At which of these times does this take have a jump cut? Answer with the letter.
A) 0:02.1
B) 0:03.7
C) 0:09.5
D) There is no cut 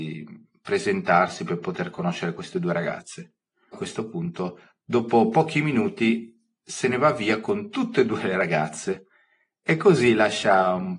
B